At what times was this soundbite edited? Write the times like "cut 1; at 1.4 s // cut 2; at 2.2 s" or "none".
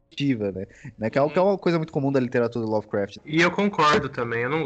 cut 1; at 3.2 s